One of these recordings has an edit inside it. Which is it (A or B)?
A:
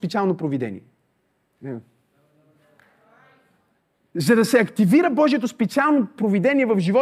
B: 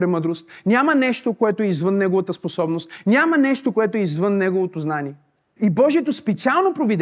B